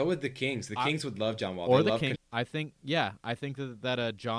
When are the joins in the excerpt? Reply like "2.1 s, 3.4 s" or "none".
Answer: 2.2 s